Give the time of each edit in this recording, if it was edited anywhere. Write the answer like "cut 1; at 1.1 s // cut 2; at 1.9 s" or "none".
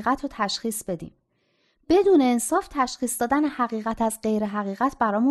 none

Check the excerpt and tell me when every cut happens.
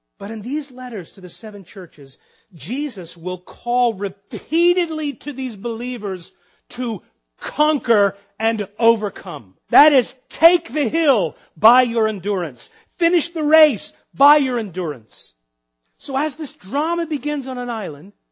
cut 1; at 9.6 s

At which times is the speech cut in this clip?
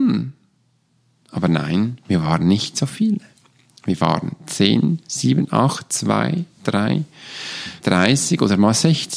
cut 1; at 7.8 s

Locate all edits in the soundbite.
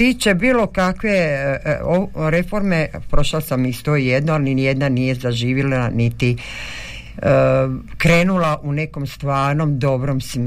cut 1; at 3.1 s

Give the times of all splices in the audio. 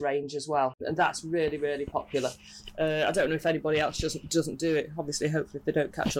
none

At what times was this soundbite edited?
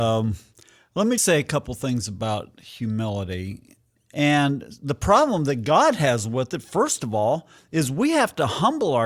cut 1; at 1.2 s // cut 2; at 4.0 s

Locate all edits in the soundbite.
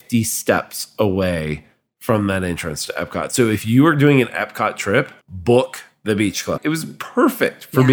cut 1; at 5.2 s // cut 2; at 6.6 s

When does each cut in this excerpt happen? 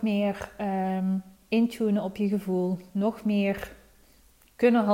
none

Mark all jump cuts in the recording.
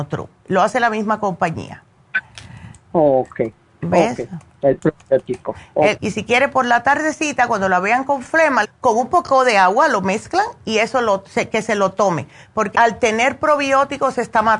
cut 1; at 6.0 s // cut 2; at 8.6 s // cut 3; at 12.7 s

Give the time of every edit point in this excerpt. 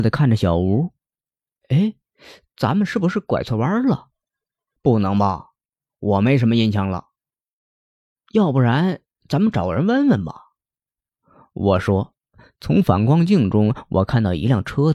none

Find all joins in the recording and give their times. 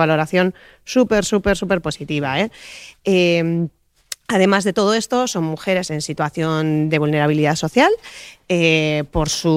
none

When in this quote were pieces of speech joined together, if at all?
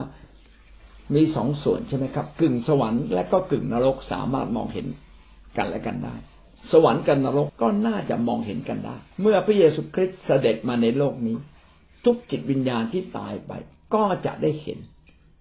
cut 1; at 7.5 s // cut 2; at 9.1 s

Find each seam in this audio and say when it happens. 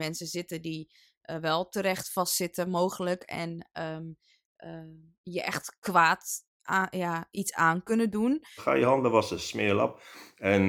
cut 1; at 8.6 s

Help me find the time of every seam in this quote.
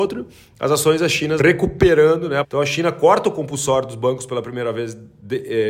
cut 1; at 1.4 s // cut 2; at 2.4 s

